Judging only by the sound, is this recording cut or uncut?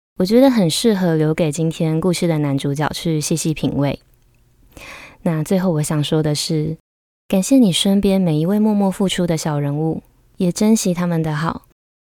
uncut